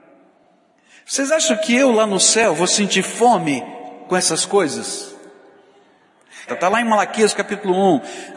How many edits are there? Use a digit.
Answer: 1